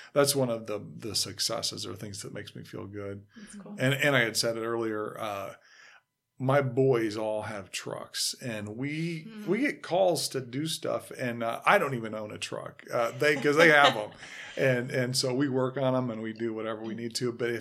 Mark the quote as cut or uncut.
uncut